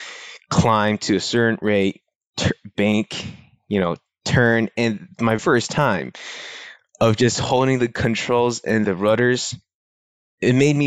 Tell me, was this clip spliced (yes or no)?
yes